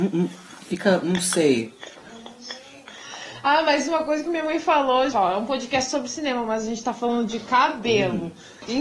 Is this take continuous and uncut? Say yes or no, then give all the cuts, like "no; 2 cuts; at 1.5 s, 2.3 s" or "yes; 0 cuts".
no; 1 cut; at 5.1 s